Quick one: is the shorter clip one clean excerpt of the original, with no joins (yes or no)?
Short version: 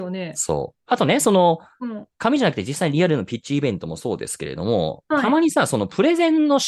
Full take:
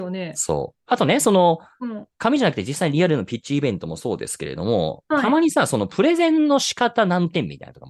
yes